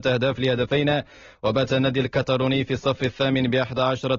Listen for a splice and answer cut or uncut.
uncut